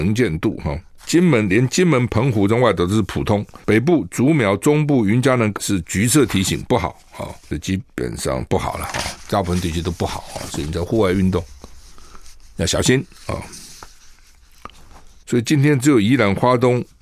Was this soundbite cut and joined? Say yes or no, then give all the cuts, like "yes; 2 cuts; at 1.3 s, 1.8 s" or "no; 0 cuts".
yes; 3 cuts; at 1.0 s, 5.5 s, 15.2 s